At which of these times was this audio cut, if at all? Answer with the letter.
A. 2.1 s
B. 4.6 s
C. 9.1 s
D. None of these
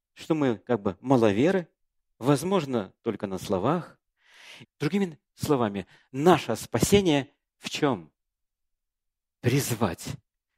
B